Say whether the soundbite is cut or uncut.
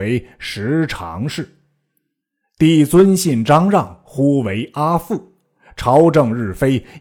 uncut